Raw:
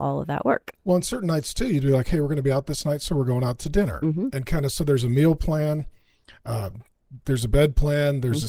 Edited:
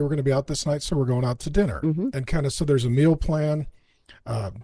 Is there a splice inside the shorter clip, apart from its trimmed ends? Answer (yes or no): no